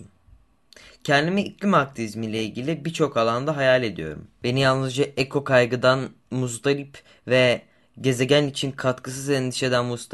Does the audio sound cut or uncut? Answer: uncut